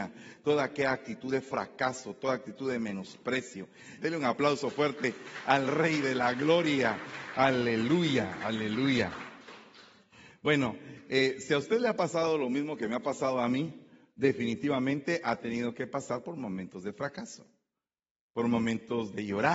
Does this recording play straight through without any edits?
no; 1 cut; at 4.0 s

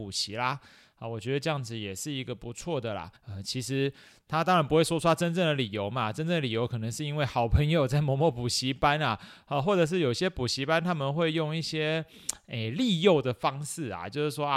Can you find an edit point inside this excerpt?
yes; 1 cut; at 3.2 s

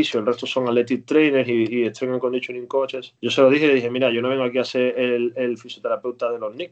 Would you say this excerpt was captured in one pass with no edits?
no; 1 cut; at 3.2 s

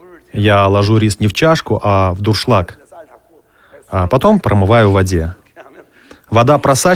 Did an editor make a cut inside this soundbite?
yes; 1 cut; at 4.4 s

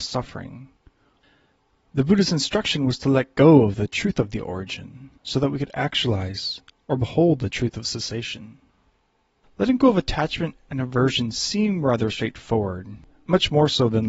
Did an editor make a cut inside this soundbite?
yes; 1 cut; at 5.2 s

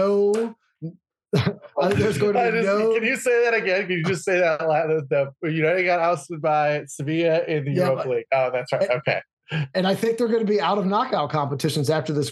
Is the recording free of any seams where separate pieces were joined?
yes; 0 cuts

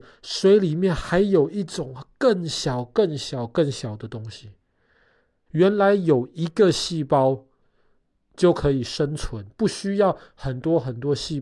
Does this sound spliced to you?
yes; 1 cut; at 5.5 s

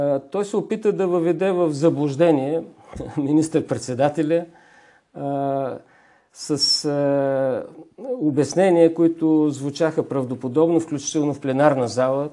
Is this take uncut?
yes; 0 cuts

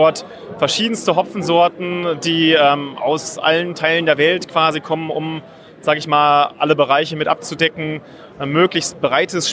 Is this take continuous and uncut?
yes; 0 cuts

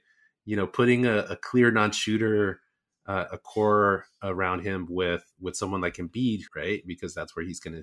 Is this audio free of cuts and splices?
no; 2 cuts; at 3.3 s, 6.5 s

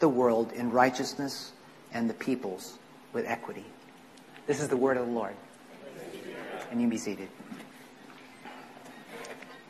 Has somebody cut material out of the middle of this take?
no; 0 cuts

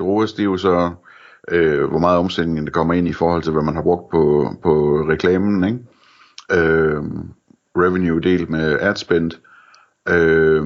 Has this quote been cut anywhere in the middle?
no; 0 cuts

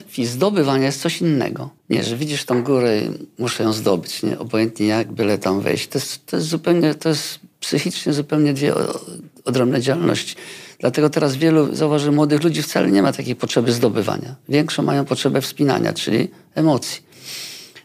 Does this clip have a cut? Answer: yes; 1 cut; at 1.8 s

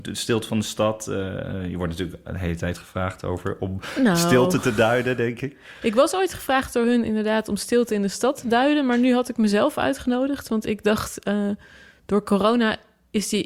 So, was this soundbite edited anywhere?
no; 0 cuts

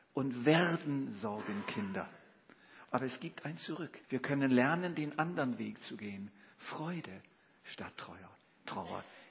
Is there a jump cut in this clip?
yes; 2 cuts; at 2.8 s, 4.0 s

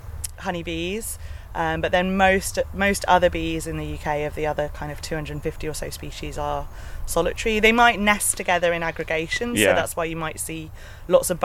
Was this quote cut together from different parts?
no; 0 cuts

